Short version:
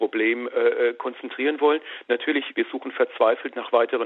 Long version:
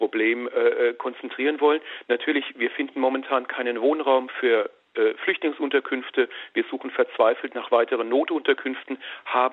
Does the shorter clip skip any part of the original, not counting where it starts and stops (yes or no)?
yes